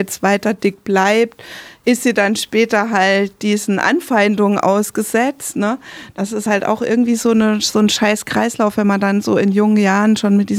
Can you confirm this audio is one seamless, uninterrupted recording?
yes; 0 cuts

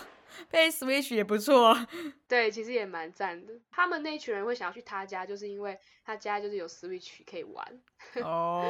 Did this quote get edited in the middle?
no; 0 cuts

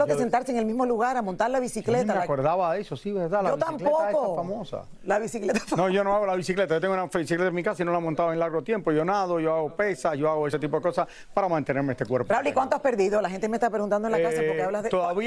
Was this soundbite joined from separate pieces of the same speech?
no; 0 cuts

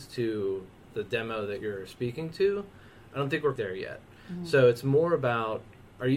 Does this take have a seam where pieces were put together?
yes; 1 cut; at 3.6 s

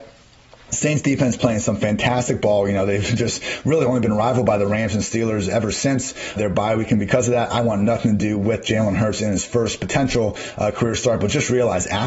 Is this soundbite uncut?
no; 1 cut; at 6.4 s

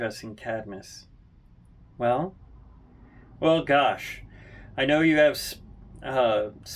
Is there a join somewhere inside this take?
yes; 1 cut; at 3.4 s

